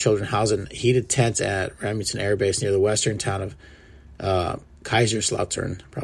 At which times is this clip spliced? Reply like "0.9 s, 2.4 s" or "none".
none